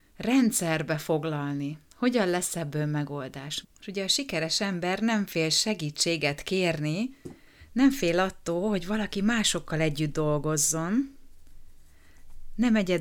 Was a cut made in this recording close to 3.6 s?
yes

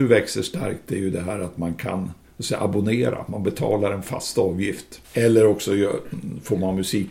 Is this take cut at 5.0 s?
yes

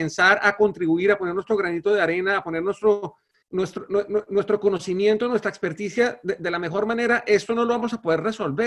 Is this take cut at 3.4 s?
yes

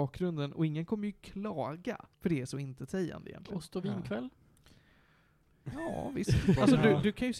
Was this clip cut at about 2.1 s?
yes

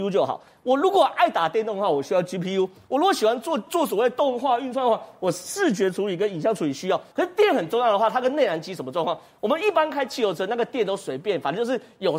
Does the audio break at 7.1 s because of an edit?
yes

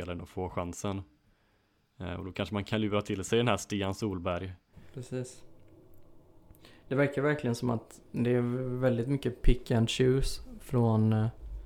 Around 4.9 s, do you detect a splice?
no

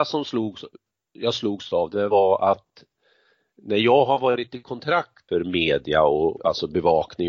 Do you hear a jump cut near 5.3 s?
yes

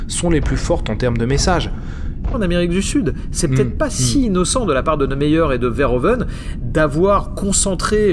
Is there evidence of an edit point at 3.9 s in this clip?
no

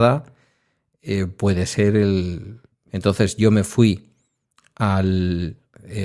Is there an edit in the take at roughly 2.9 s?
yes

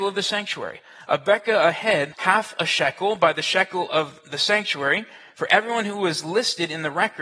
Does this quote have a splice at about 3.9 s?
no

